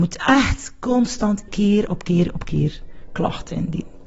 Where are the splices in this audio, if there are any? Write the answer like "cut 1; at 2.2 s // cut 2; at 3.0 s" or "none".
cut 1; at 1.5 s

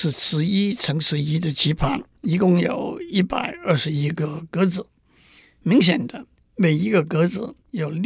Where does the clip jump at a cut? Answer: cut 1; at 2.2 s

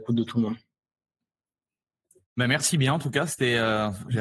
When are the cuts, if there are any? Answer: none

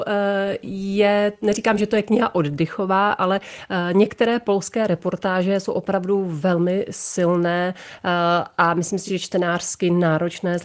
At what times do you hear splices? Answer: none

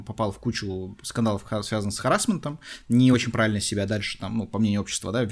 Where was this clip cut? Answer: none

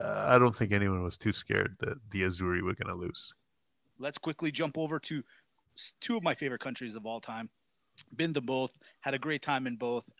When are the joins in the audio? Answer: cut 1; at 3.9 s

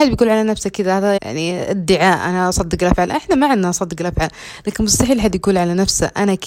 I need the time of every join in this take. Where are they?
cut 1; at 1.2 s

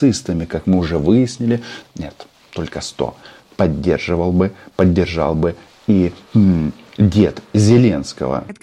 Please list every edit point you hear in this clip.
cut 1; at 1.9 s

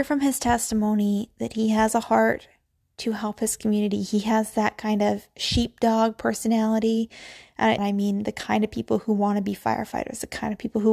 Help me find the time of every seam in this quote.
cut 1; at 7.8 s

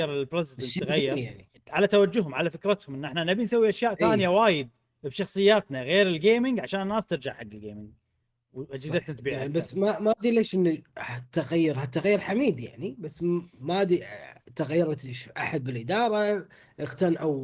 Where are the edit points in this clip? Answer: cut 1; at 1.5 s

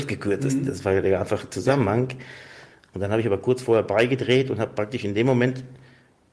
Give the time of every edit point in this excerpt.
none

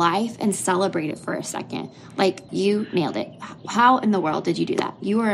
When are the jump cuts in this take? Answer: cut 1; at 2.5 s

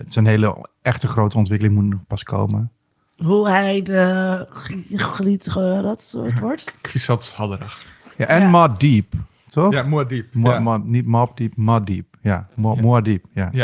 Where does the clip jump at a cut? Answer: none

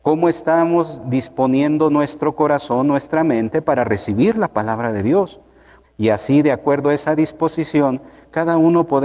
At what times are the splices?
cut 1; at 5.8 s

